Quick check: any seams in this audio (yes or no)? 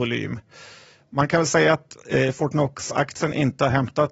no